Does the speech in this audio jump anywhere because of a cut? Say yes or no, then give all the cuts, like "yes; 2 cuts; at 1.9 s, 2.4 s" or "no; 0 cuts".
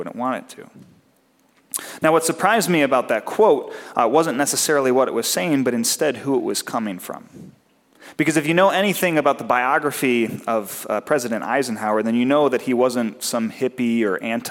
no; 0 cuts